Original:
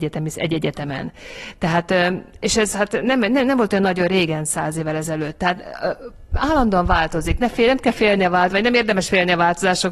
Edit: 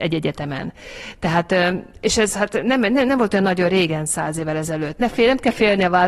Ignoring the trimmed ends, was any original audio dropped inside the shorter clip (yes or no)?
yes